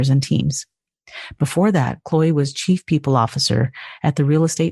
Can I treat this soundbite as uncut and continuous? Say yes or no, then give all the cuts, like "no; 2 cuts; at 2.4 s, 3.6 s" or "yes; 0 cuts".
yes; 0 cuts